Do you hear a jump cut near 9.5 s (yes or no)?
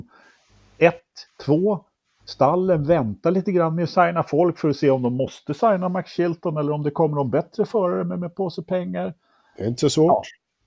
no